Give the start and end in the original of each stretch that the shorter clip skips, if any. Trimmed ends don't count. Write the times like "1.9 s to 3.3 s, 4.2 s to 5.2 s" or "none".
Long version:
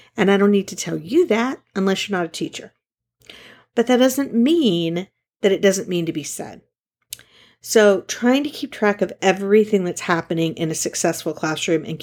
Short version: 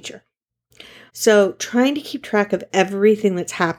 3.6 s to 7.6 s

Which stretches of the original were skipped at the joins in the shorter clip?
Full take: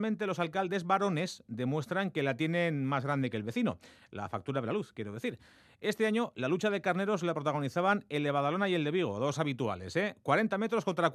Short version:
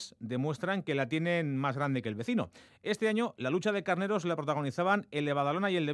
4.0 s to 5.7 s

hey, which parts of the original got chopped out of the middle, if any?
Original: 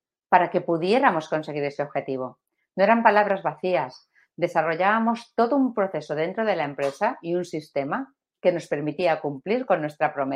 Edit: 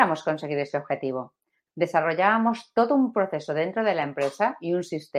2.7 s to 4.3 s

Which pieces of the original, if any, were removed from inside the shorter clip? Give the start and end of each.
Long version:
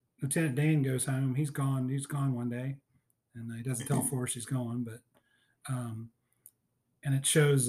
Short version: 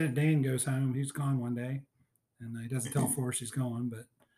1.3 s to 1.9 s

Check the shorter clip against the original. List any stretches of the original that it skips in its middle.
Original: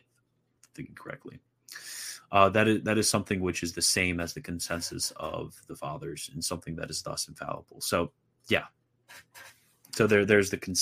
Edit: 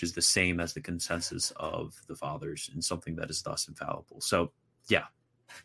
none

